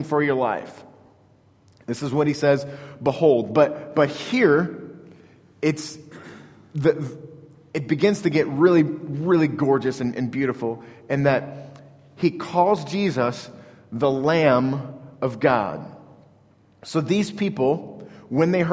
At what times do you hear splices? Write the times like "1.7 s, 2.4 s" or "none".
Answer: none